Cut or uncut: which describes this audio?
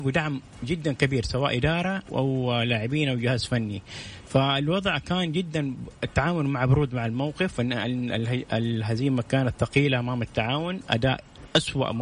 cut